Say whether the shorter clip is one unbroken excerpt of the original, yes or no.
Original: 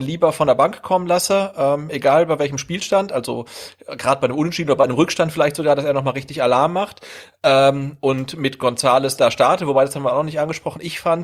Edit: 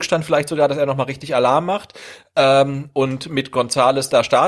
yes